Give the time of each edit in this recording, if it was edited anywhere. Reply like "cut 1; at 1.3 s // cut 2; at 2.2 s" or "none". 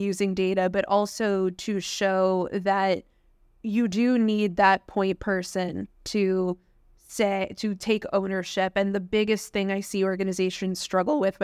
none